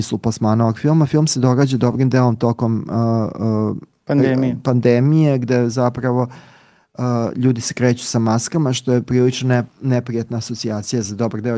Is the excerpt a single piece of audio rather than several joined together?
no; 1 cut; at 9.7 s

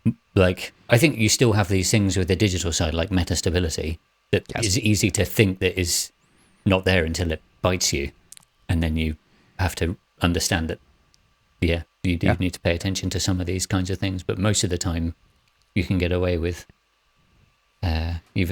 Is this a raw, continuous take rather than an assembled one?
yes; 0 cuts

